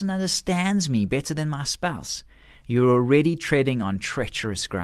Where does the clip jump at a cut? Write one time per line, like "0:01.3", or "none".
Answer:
none